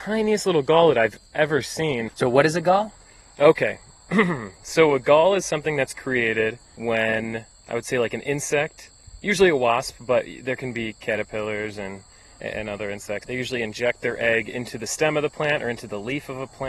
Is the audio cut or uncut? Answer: uncut